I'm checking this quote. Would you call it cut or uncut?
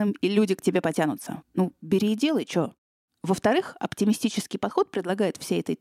cut